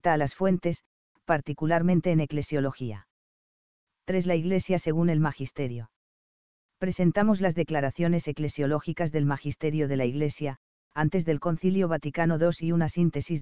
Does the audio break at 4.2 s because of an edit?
no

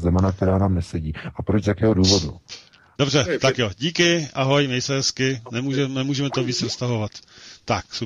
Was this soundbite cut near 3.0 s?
yes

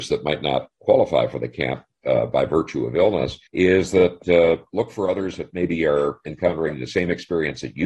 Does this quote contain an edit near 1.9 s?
no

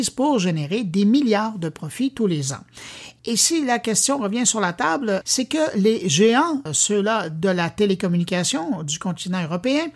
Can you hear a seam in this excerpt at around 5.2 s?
yes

